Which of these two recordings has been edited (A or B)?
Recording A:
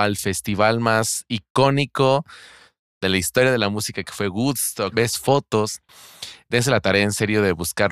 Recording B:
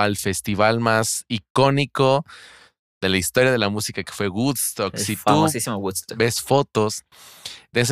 A